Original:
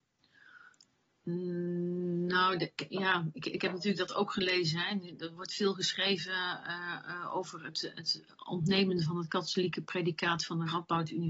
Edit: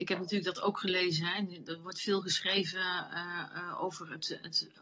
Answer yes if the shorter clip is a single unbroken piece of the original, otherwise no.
yes